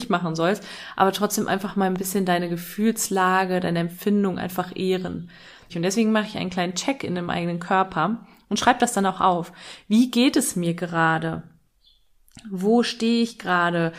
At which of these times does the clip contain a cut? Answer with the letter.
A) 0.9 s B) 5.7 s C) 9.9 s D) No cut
B